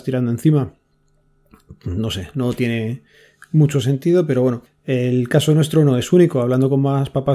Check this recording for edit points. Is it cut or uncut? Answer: uncut